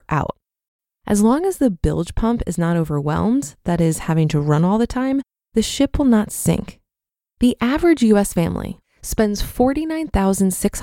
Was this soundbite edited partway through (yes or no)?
yes